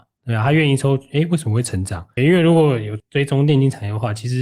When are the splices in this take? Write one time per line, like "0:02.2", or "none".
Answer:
0:02.2